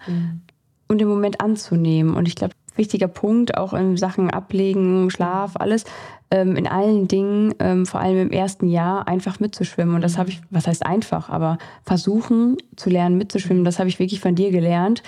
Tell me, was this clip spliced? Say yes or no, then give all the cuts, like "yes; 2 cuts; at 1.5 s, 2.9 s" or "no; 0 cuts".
yes; 1 cut; at 2.5 s